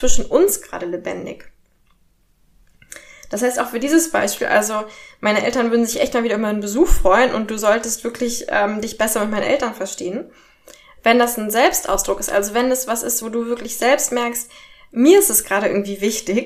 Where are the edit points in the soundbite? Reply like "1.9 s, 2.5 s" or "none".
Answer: none